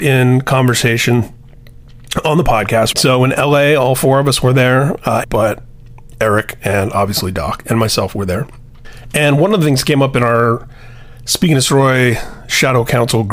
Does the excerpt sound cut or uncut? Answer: cut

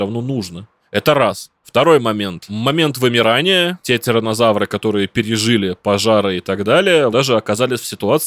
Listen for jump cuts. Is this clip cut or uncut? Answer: cut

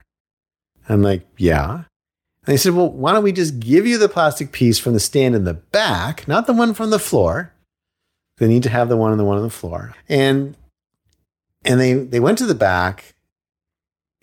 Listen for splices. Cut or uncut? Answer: cut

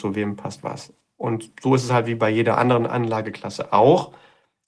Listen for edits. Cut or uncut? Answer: uncut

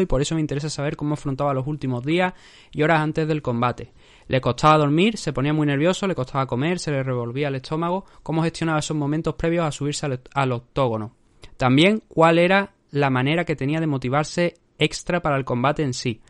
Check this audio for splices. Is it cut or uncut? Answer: uncut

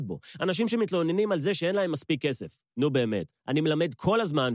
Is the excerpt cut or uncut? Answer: uncut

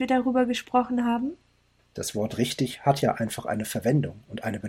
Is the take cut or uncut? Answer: cut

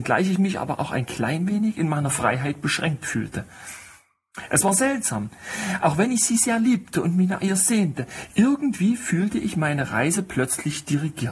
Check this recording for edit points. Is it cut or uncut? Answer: uncut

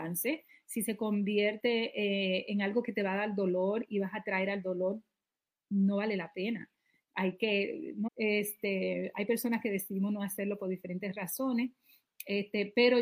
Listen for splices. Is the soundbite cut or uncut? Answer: cut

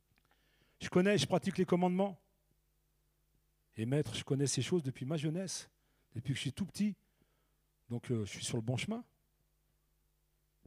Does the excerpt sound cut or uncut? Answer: uncut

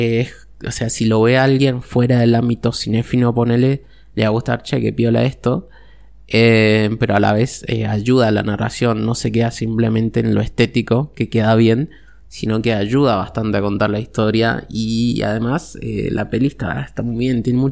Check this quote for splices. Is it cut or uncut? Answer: uncut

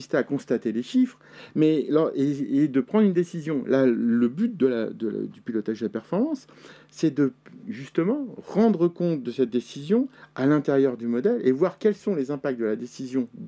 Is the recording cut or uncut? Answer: uncut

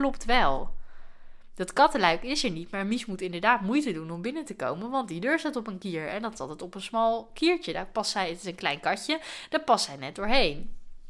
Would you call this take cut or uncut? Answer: uncut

